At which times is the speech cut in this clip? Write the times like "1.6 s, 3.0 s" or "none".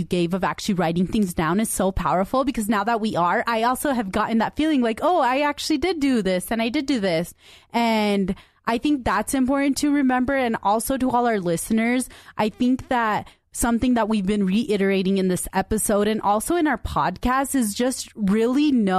none